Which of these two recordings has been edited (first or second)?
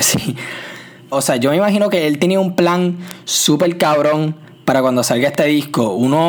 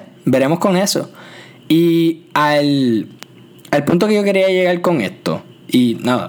first